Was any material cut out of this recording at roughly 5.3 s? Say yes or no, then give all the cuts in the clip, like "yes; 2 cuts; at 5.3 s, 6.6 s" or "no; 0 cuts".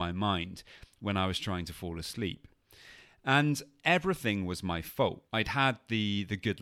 yes; 1 cut; at 5.3 s